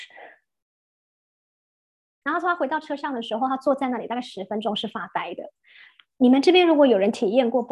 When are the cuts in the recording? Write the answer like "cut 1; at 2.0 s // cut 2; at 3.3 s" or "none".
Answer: cut 1; at 2.2 s